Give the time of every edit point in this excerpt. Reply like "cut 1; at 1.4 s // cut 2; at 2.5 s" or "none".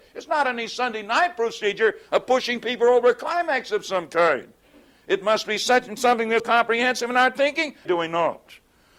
cut 1; at 6.4 s // cut 2; at 7.9 s